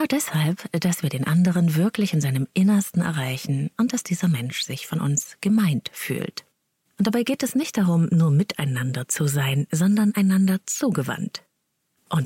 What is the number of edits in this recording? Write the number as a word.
one